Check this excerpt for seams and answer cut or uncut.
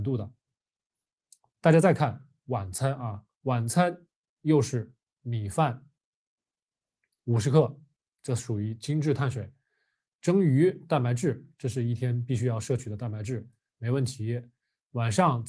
cut